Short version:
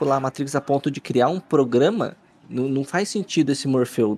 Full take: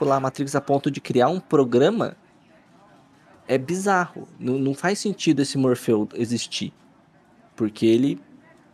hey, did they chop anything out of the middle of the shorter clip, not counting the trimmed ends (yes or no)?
yes